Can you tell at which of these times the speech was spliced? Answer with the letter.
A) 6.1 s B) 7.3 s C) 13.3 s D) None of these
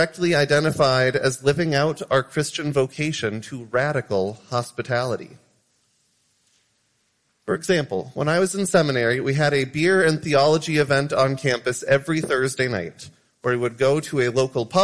D